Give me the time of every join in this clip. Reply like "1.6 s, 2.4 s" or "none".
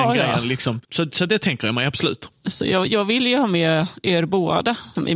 none